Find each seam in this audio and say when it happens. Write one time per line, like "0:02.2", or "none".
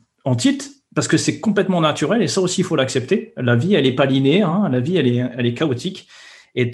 none